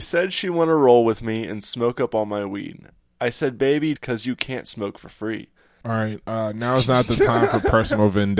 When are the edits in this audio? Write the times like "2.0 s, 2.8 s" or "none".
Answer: 4.0 s, 5.8 s